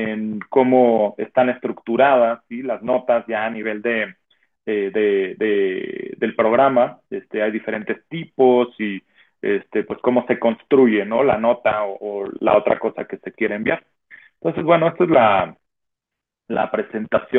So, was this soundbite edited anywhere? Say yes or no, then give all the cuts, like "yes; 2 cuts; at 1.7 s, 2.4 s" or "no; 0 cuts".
no; 0 cuts